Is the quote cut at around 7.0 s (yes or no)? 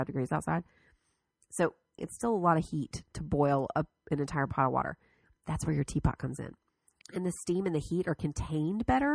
yes